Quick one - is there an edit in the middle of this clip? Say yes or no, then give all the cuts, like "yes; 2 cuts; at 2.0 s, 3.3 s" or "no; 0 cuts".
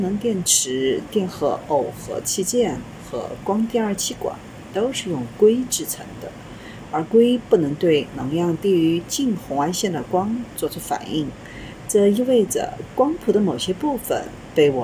no; 0 cuts